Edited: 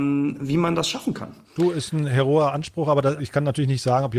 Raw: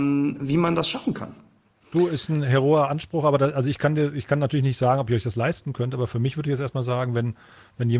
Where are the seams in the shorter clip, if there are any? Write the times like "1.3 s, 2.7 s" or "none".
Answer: 1.4 s, 3.2 s